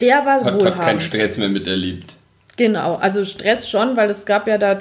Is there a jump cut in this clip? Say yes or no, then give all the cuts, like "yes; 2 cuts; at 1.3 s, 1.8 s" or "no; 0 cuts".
no; 0 cuts